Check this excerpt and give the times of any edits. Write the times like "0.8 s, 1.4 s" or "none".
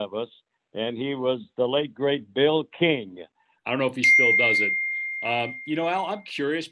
3.6 s